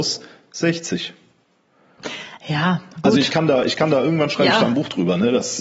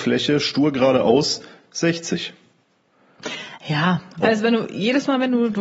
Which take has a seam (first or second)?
second